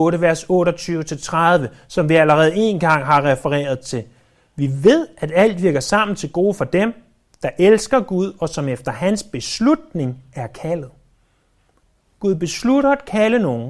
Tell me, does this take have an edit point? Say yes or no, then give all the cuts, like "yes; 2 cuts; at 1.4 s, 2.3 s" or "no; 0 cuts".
no; 0 cuts